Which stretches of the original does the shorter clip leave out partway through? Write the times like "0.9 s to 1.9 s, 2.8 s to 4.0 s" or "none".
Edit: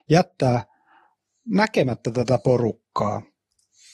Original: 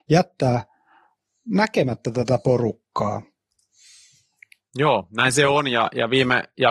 none